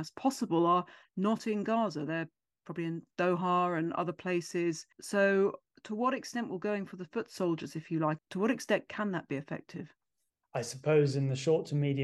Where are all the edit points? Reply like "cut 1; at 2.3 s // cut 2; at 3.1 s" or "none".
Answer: cut 1; at 4.9 s // cut 2; at 8.2 s